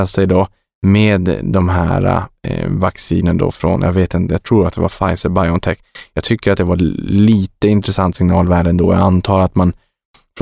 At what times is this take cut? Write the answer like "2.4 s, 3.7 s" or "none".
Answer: none